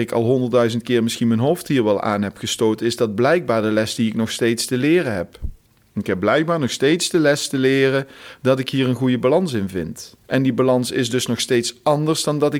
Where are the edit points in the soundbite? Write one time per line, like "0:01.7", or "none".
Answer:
0:10.2